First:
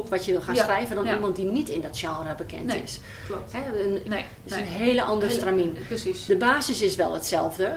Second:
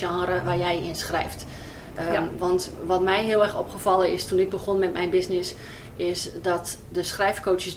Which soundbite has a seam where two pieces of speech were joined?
first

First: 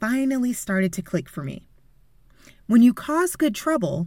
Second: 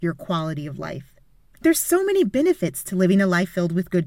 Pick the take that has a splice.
second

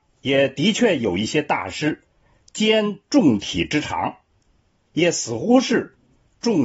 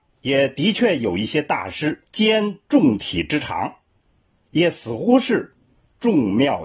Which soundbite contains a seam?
second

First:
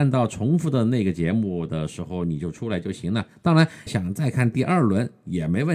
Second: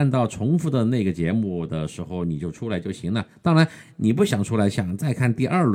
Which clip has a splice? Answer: first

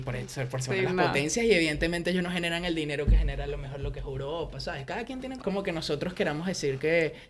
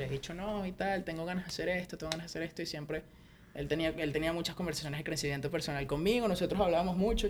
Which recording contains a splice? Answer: first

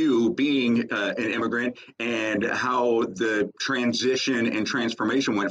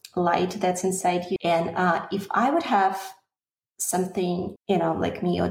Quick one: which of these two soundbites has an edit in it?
second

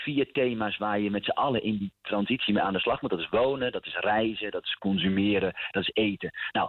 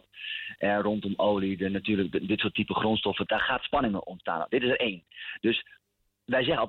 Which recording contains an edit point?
second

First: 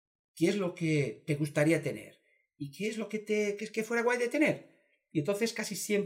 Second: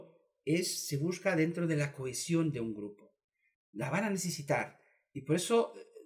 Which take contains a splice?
second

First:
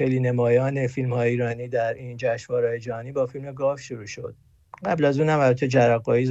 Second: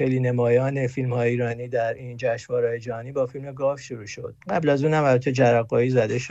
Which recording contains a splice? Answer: second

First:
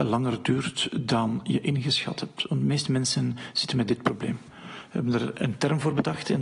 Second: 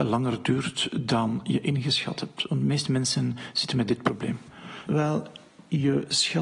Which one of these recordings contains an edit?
second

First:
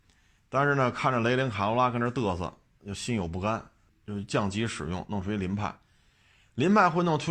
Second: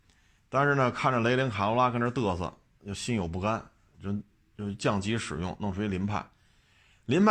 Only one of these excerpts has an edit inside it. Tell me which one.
first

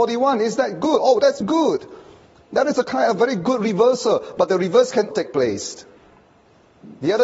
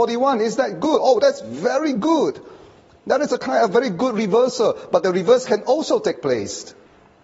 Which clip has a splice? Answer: first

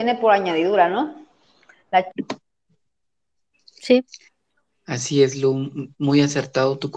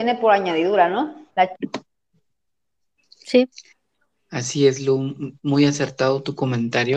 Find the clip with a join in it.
second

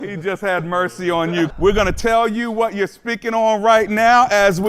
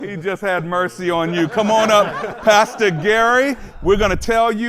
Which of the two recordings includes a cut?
first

